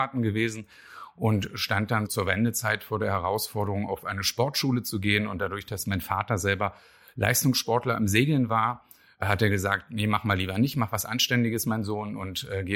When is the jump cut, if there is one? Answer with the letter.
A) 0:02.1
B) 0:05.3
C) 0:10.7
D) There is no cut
A